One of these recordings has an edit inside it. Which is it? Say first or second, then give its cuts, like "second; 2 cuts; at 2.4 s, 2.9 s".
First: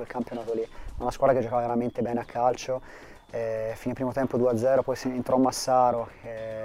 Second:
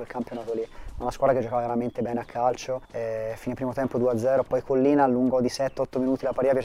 second; 2 cuts; at 2.8 s, 4.4 s